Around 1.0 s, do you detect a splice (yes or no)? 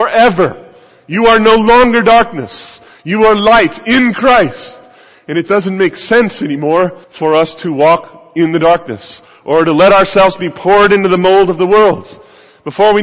no